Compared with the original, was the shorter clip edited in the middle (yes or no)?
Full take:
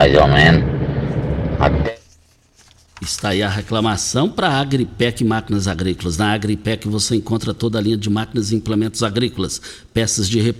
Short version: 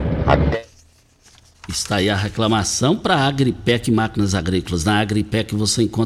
no